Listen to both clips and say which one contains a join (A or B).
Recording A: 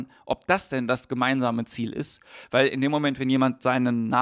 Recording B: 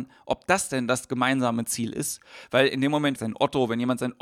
B